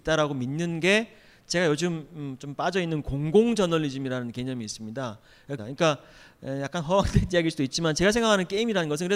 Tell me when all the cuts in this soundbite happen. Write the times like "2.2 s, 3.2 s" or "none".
5.6 s